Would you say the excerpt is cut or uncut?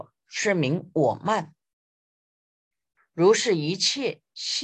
cut